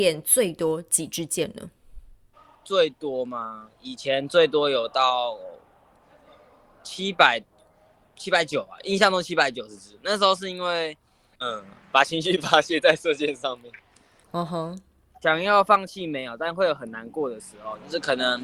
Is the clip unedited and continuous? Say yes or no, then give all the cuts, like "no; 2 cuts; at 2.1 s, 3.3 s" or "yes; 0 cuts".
no; 2 cuts; at 11.3 s, 14.2 s